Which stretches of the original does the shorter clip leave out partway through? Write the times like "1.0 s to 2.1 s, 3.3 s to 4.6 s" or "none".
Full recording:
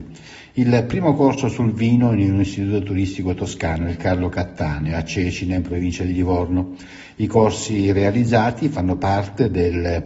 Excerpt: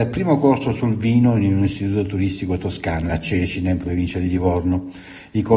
3.9 s to 4.9 s